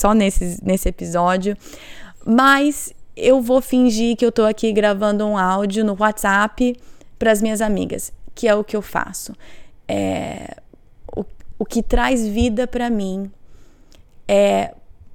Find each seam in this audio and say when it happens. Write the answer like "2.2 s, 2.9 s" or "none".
11.5 s